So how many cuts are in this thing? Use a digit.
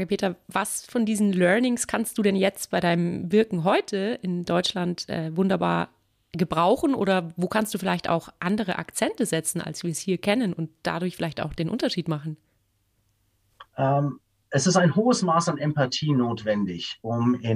1